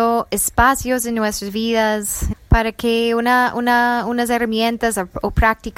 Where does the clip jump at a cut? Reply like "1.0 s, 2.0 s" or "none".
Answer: 2.3 s